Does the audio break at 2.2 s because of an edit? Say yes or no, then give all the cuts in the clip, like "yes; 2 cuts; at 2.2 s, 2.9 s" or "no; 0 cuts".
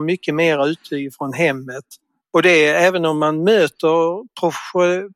yes; 1 cut; at 2.2 s